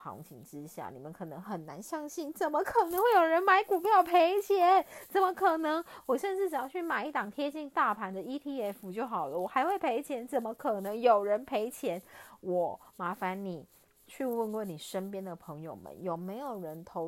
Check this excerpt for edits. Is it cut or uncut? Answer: uncut